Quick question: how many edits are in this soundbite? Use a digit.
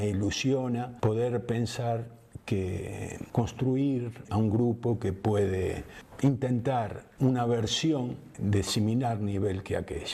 1